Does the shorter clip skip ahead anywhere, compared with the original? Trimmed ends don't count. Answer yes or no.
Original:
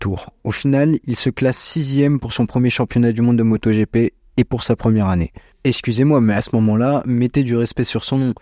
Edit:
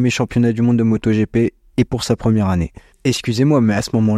no